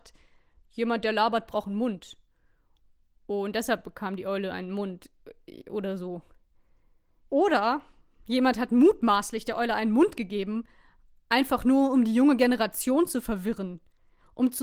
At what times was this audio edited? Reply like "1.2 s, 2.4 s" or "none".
none